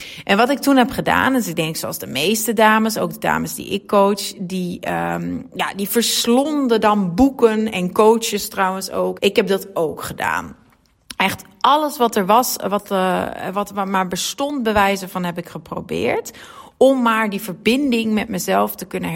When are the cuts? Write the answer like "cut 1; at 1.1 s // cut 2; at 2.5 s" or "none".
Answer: cut 1; at 9.2 s